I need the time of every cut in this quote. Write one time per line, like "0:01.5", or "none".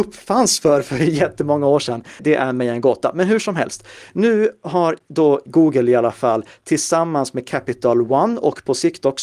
0:02.2